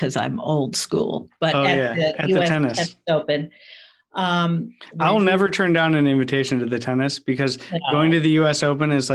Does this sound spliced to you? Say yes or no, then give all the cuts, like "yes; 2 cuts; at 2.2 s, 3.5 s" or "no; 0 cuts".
no; 0 cuts